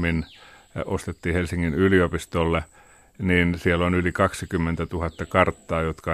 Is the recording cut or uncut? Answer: uncut